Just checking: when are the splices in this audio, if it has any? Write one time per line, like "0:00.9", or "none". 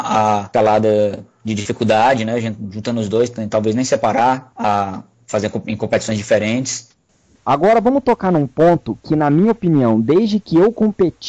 none